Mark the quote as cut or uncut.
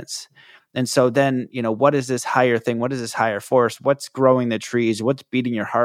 uncut